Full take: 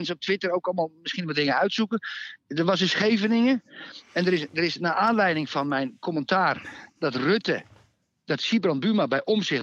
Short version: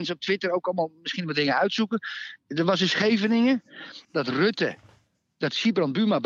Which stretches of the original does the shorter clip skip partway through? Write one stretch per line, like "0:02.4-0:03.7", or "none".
0:04.0-0:06.9